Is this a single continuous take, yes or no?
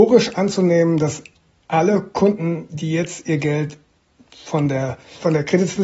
yes